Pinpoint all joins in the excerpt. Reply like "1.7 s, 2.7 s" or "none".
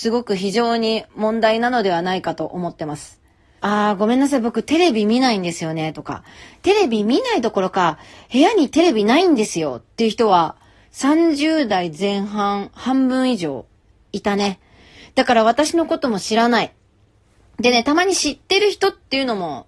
3.6 s